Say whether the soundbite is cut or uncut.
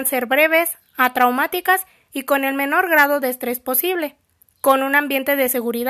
uncut